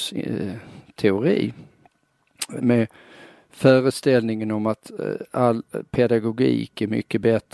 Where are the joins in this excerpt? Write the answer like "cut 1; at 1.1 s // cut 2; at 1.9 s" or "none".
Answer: cut 1; at 2.6 s